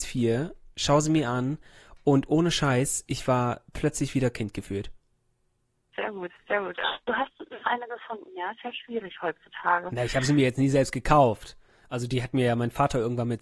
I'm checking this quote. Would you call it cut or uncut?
uncut